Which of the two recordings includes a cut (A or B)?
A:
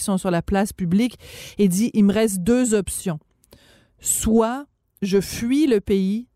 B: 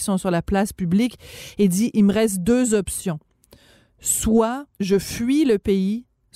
B